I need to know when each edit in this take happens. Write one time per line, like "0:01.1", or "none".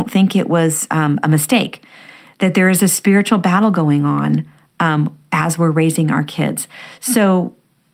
none